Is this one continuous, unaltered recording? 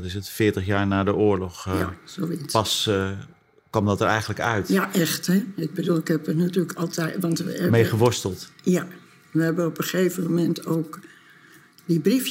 yes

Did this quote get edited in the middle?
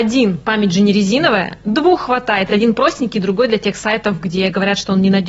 no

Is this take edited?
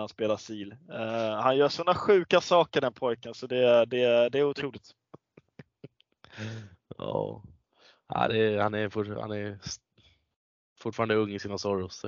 no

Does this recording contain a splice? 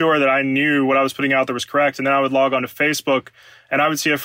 no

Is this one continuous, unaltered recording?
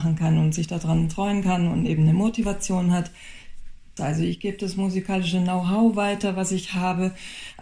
no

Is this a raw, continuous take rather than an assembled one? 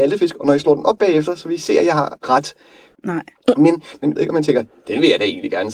no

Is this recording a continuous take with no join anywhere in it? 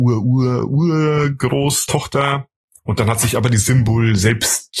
no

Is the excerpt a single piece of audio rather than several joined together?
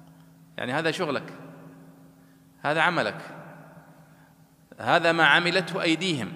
yes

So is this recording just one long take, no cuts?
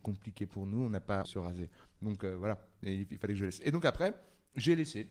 no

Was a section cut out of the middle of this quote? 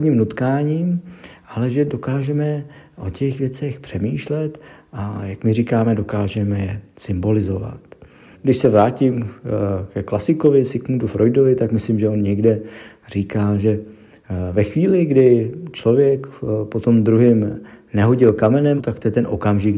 yes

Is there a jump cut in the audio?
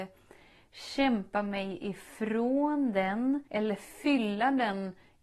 yes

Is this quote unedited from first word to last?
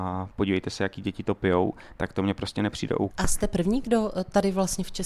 no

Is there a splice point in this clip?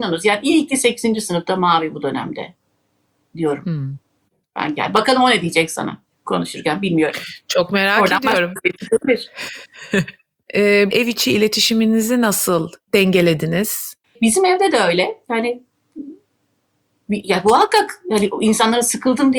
yes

